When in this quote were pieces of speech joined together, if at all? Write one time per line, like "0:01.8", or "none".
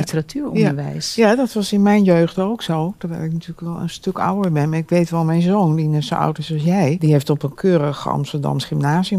none